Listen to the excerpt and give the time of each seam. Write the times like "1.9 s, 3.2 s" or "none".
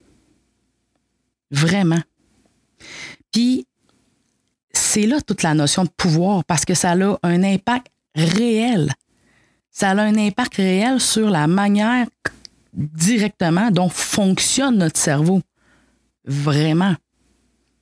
none